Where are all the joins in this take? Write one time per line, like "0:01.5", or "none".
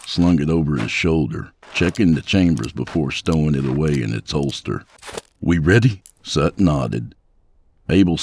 0:01.6
0:06.0